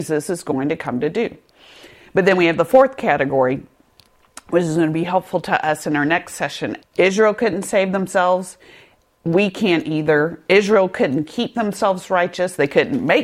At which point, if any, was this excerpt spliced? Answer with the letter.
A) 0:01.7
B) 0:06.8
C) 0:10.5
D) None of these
B